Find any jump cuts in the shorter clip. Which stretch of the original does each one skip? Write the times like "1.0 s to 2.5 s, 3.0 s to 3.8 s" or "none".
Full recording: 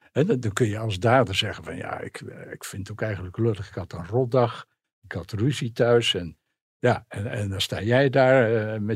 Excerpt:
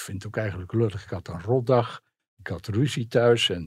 none